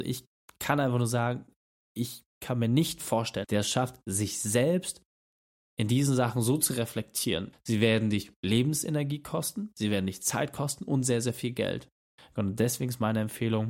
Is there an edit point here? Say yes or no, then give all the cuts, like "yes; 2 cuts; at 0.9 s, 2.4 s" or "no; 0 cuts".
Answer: yes; 3 cuts; at 3.4 s, 7.5 s, 12.2 s